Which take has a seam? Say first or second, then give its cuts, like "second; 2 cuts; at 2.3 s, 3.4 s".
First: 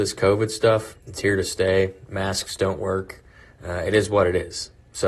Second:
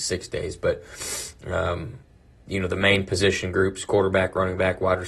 first; 1 cut; at 0.9 s